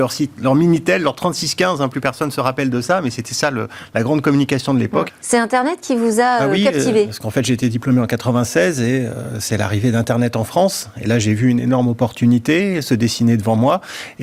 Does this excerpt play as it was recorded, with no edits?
no; 1 cut; at 5.1 s

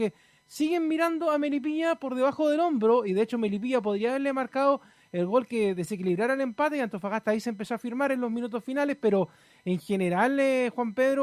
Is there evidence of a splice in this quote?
no; 0 cuts

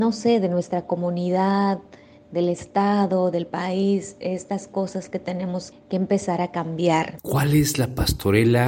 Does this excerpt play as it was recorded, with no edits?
no; 2 cuts; at 5.7 s, 7.2 s

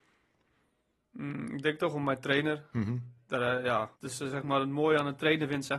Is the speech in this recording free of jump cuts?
no; 1 cut; at 3.9 s

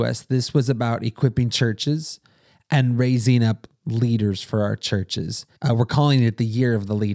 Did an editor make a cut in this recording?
yes; 1 cut; at 5.6 s

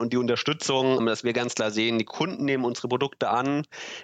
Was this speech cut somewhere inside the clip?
yes; 1 cut; at 1.0 s

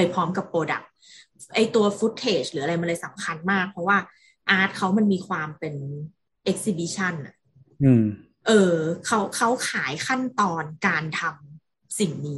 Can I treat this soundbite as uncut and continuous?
yes; 0 cuts

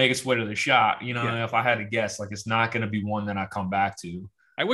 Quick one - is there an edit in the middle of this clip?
no; 0 cuts

